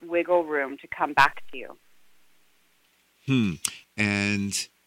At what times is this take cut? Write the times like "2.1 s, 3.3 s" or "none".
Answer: 3.8 s